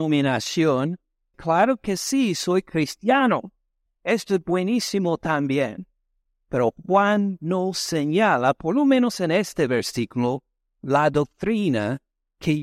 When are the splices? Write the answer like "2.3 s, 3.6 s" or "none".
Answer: 1.3 s, 3.9 s